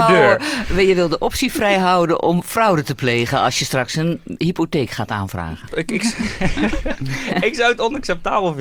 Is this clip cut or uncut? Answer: cut